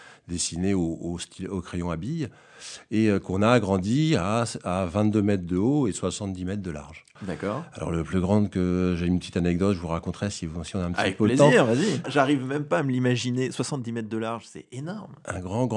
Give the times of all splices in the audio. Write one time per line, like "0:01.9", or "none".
0:07.2
0:12.0